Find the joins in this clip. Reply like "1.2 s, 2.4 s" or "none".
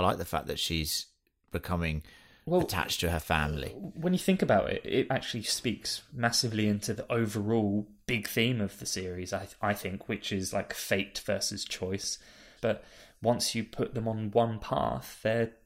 5.1 s, 12.6 s